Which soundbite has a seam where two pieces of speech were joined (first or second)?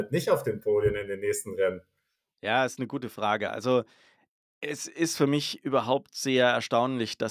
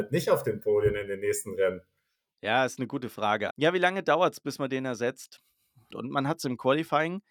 second